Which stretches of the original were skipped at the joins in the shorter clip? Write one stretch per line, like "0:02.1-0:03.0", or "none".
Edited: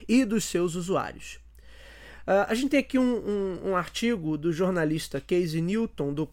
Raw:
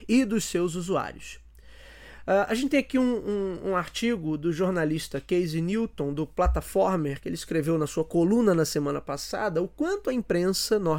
none